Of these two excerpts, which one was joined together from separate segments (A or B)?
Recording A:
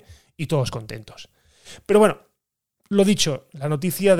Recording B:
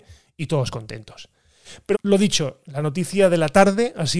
B